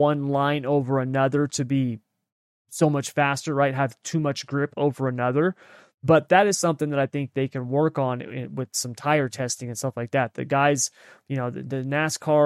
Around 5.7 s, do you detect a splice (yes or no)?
no